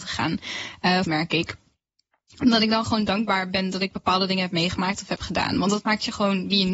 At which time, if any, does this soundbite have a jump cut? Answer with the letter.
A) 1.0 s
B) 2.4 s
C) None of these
A